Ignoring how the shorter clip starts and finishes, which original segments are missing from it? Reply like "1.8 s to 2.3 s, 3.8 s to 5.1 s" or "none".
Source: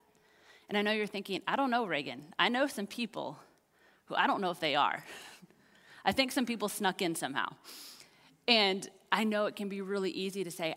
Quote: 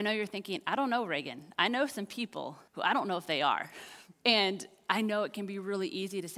3.5 s to 4.0 s, 5.5 s to 8.4 s